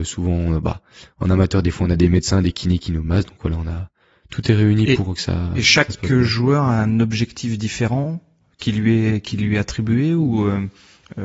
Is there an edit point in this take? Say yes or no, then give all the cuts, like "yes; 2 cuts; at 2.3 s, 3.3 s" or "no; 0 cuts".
no; 0 cuts